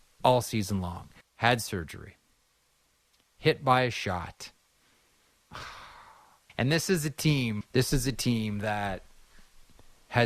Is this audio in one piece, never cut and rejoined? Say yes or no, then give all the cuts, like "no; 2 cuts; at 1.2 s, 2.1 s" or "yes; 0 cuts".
no; 3 cuts; at 1.2 s, 6.5 s, 7.6 s